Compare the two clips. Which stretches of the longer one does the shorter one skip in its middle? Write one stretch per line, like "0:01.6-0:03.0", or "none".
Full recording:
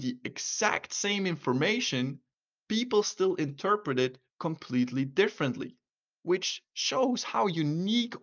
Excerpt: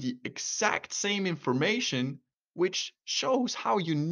0:02.4-0:06.1